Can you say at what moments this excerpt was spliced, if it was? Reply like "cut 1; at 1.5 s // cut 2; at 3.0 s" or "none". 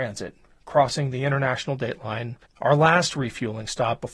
cut 1; at 2.4 s